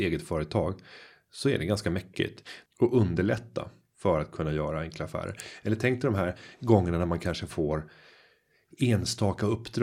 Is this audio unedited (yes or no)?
no